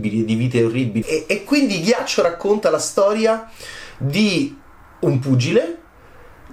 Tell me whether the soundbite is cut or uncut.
cut